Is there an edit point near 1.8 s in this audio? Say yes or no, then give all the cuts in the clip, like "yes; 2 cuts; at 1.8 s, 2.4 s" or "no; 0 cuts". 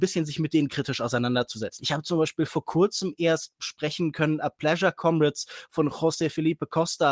yes; 1 cut; at 1.8 s